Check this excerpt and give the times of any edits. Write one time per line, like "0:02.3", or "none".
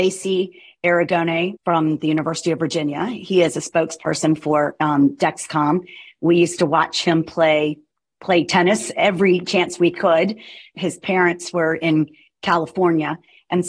none